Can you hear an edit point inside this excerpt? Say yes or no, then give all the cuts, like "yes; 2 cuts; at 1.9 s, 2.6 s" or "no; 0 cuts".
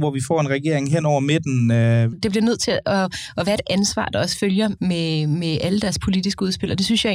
yes; 2 cuts; at 2.1 s, 4.8 s